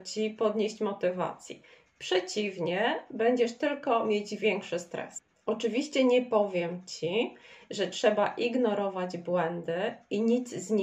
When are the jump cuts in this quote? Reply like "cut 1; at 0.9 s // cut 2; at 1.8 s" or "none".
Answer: none